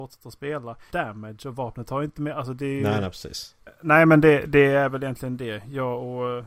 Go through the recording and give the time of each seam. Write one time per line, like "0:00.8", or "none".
0:00.9
0:03.7